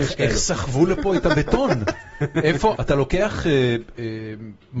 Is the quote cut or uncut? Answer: cut